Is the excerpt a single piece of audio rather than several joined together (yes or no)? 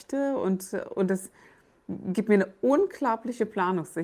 yes